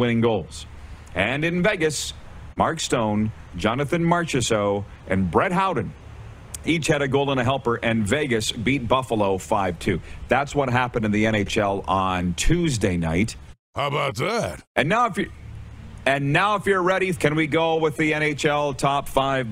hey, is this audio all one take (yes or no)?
no